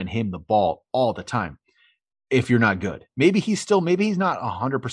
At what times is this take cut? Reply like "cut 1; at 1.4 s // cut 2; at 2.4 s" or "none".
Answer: none

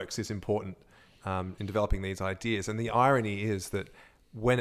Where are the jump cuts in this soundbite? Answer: cut 1; at 1.6 s

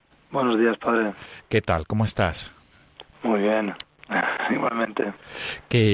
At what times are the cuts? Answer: cut 1; at 3.8 s

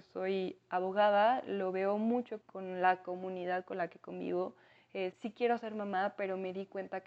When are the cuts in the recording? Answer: cut 1; at 2.4 s // cut 2; at 5.1 s

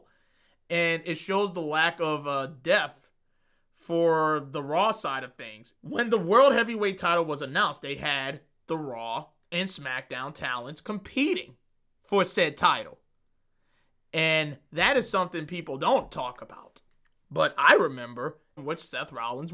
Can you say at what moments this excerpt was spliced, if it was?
cut 1; at 5.8 s // cut 2; at 17.1 s // cut 3; at 18.6 s

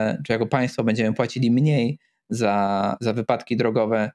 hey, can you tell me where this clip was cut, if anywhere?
none

